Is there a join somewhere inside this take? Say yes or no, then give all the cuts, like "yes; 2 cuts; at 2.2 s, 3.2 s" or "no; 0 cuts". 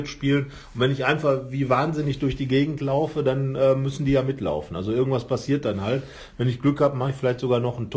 no; 0 cuts